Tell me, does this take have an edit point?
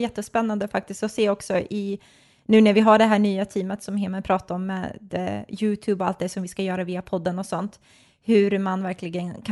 no; 0 cuts

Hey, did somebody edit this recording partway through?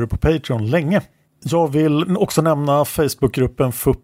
yes; 1 cut; at 1.3 s

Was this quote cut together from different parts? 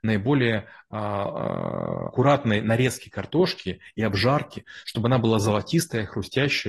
yes; 1 cut; at 2.1 s

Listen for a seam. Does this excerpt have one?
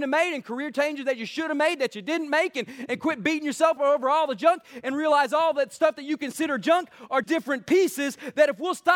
yes; 2 cuts; at 3.8 s, 7.2 s

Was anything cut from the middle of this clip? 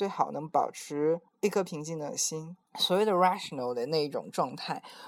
yes; 2 cuts; at 1.3 s, 2.7 s

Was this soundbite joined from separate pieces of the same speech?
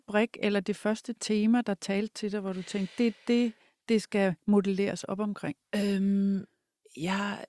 no; 0 cuts

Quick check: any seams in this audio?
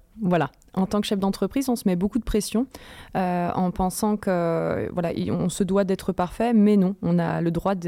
no; 0 cuts

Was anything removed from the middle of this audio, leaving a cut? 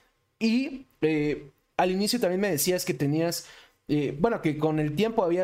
no; 0 cuts

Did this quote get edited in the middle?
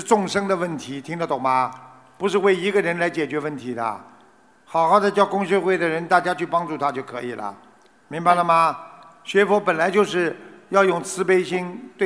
no; 0 cuts

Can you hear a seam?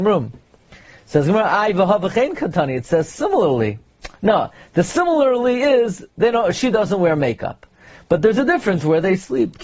no; 0 cuts

